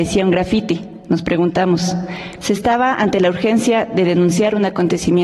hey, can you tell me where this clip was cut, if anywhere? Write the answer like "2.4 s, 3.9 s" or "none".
2.4 s